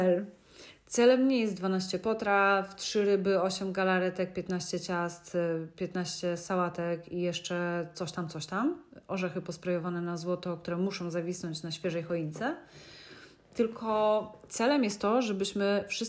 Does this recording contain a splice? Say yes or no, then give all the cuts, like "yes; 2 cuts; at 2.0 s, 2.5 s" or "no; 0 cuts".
no; 0 cuts